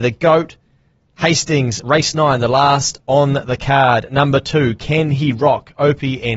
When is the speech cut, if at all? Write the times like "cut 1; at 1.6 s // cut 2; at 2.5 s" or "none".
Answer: none

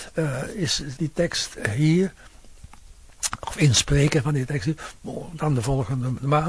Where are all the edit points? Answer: cut 1; at 1.0 s

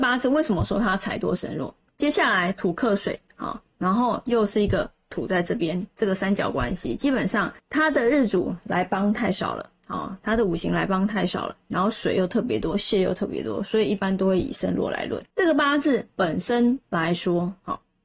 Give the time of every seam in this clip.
cut 1; at 1.9 s // cut 2; at 15.3 s

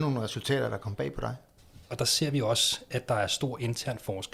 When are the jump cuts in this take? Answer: cut 1; at 1.9 s

